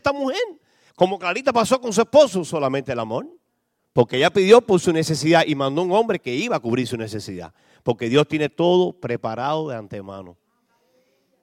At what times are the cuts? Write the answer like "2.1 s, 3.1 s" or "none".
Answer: 0.9 s, 3.8 s